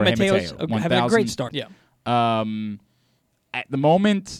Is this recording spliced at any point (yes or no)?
yes